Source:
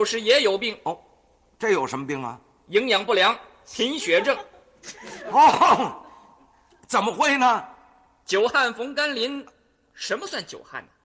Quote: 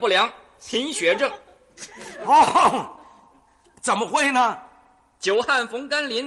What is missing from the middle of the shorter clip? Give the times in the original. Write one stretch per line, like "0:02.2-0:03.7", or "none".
none